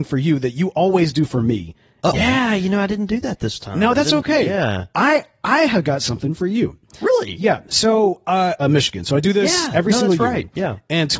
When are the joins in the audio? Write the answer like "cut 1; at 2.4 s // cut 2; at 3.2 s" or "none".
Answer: cut 1; at 2.1 s // cut 2; at 8.6 s